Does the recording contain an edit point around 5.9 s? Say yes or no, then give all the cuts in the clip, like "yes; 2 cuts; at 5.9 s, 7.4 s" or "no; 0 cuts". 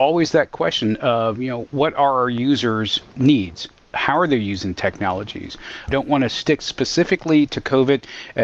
yes; 1 cut; at 5.9 s